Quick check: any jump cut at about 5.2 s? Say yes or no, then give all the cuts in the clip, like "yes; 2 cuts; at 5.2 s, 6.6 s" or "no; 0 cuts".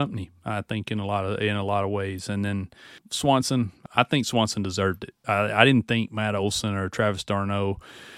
yes; 1 cut; at 5.2 s